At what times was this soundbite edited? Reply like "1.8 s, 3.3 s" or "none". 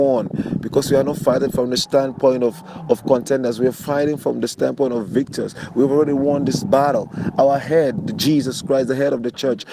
none